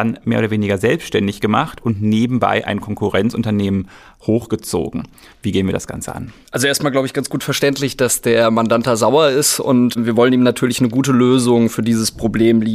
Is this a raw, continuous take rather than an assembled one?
no; 1 cut; at 5.3 s

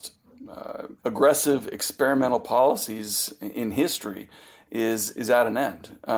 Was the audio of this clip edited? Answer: yes; 1 cut; at 1.0 s

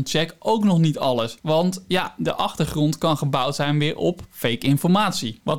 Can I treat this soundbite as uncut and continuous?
yes; 0 cuts

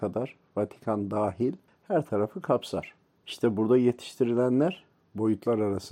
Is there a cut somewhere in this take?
yes; 1 cut; at 3.2 s

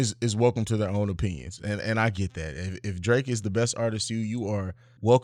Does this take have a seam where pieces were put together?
no; 0 cuts

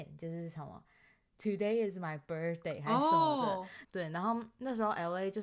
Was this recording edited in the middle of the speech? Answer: yes; 1 cut; at 3.8 s

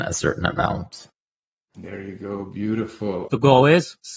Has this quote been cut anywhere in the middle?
yes; 1 cut; at 3.3 s

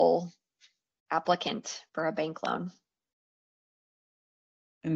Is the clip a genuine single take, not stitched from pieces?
no; 1 cut; at 1.9 s

